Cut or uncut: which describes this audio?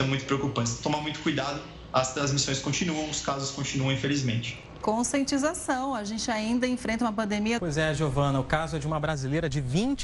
cut